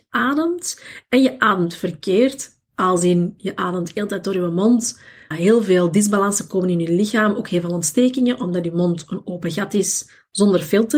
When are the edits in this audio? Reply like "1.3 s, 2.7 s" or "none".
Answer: 5.3 s